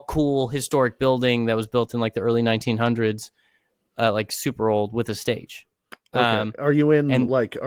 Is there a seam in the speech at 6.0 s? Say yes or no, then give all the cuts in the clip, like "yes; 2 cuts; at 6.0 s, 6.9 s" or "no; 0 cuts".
no; 0 cuts